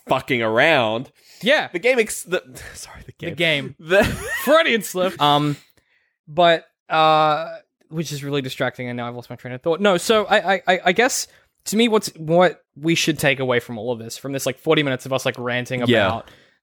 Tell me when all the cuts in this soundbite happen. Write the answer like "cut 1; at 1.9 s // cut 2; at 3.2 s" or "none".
cut 1; at 5.1 s

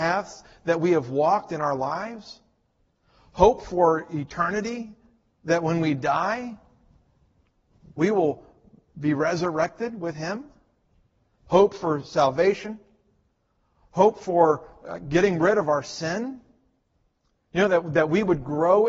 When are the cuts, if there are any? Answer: cut 1; at 11.4 s

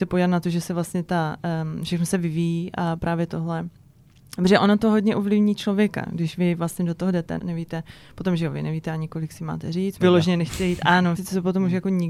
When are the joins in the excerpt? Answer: cut 1; at 7.4 s // cut 2; at 10.0 s // cut 3; at 11.2 s

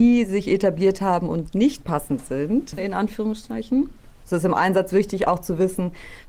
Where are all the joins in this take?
cut 1; at 2.8 s

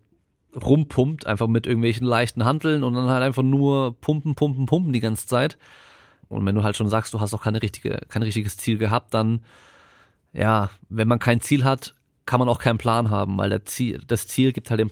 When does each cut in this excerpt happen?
cut 1; at 6.2 s

